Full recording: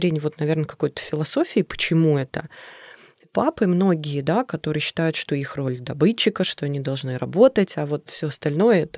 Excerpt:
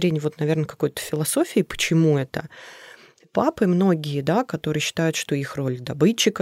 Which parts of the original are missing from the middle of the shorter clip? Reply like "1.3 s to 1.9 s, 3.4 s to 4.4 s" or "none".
none

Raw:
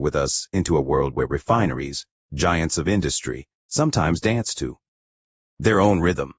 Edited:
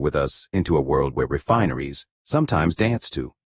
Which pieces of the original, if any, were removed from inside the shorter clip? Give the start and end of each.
2.2 s to 3.6 s

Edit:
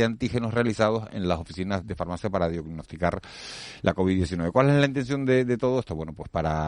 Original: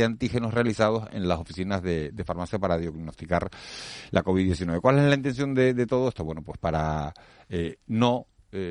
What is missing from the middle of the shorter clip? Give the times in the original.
1.8 s to 2.1 s

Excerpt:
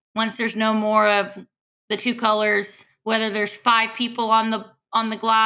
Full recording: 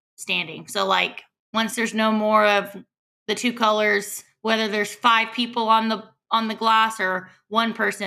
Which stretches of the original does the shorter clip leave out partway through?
none

